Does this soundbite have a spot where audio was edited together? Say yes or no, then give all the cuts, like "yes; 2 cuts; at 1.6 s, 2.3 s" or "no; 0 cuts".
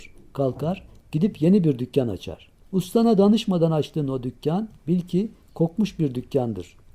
yes; 1 cut; at 2.6 s